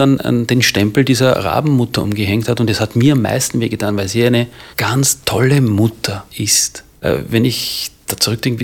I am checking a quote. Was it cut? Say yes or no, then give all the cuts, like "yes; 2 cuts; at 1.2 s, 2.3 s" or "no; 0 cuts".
yes; 1 cut; at 4.7 s